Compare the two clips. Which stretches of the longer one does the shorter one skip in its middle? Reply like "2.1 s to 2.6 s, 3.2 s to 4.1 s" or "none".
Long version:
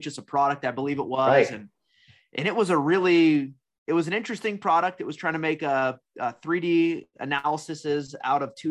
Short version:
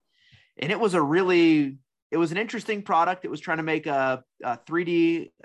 none